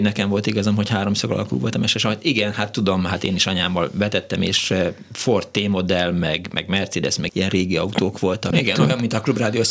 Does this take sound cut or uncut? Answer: cut